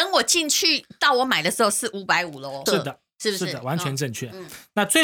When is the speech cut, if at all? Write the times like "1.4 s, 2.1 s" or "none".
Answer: 2.7 s